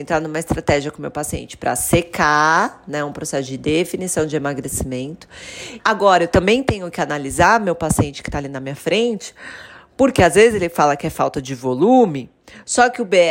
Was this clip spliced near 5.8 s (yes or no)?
yes